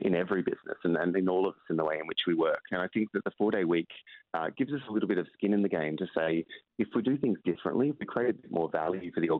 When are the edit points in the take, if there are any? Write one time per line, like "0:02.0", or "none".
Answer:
none